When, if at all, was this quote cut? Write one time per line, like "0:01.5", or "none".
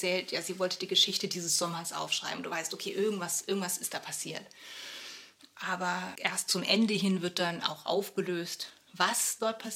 0:06.2